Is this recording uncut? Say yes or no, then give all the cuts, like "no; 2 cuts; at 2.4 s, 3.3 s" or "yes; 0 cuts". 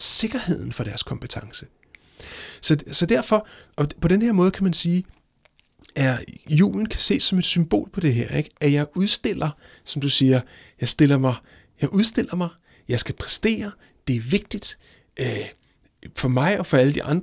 yes; 0 cuts